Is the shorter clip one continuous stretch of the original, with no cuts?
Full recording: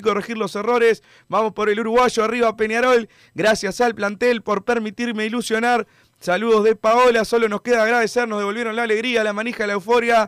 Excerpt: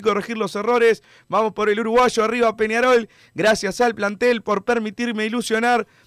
yes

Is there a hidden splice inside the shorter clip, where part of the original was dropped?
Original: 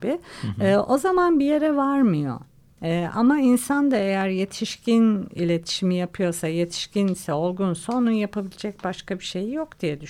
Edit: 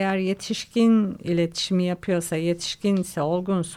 no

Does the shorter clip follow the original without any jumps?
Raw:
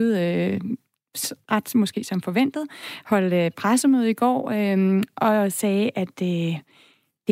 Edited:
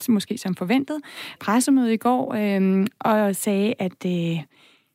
no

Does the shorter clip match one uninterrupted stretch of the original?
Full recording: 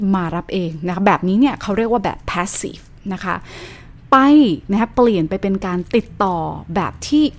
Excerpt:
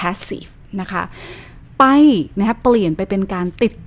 yes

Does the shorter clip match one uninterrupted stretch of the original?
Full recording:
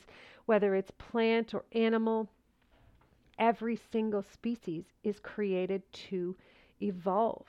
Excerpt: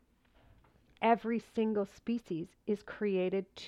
yes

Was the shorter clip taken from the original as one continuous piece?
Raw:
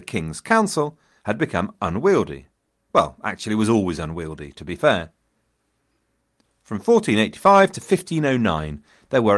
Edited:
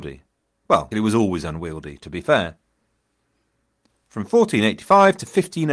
no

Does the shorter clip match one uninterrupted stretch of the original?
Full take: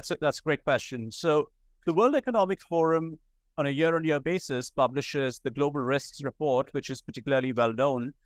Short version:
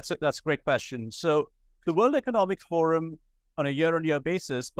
yes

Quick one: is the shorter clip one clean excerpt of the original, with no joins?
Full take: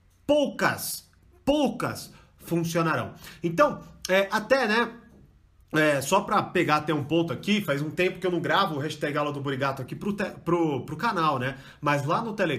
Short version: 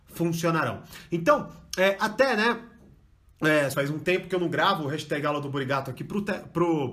no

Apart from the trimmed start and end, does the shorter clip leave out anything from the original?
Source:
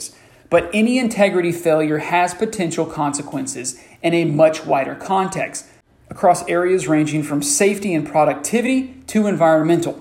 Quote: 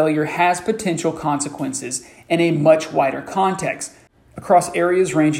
no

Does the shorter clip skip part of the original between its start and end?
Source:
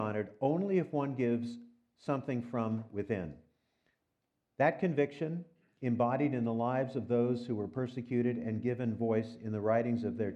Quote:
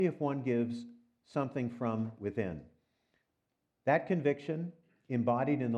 no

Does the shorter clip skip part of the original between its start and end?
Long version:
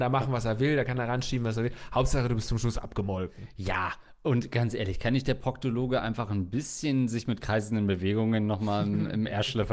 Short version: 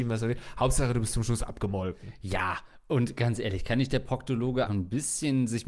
yes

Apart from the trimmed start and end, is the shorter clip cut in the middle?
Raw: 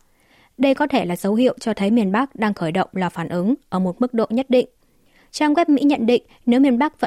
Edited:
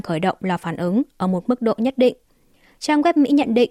no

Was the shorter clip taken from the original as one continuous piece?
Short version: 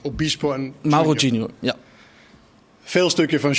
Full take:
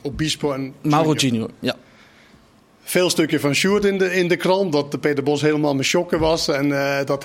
yes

